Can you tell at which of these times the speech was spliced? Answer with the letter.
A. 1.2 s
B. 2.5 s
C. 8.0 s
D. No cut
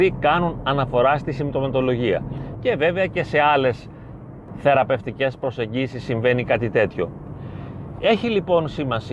B